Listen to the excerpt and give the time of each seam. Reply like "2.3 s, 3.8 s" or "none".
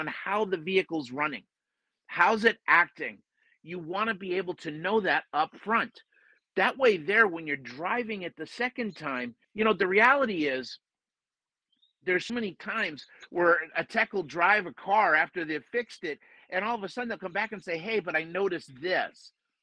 9.4 s, 12.3 s